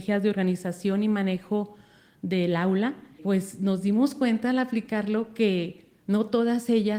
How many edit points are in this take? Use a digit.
1